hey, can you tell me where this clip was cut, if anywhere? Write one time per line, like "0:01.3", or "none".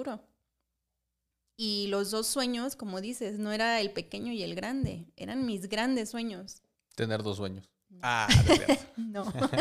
0:06.8